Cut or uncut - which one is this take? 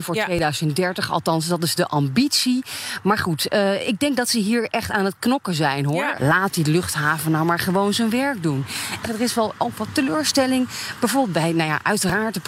cut